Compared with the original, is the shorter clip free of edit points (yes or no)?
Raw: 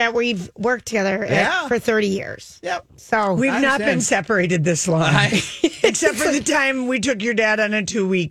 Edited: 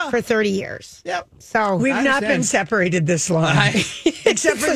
yes